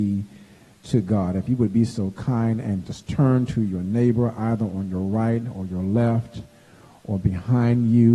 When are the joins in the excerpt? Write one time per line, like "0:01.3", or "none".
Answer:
none